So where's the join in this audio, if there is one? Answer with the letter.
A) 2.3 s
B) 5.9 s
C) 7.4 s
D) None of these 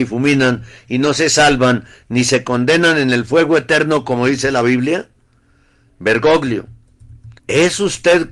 C